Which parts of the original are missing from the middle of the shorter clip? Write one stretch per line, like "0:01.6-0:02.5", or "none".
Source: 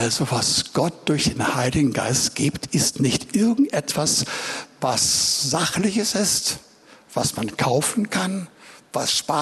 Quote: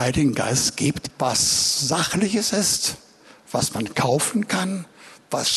0:02.7-0:04.7